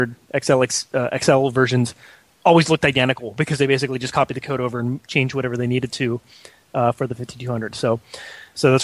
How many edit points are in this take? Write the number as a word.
zero